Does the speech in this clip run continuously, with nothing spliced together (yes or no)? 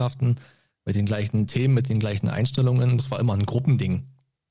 no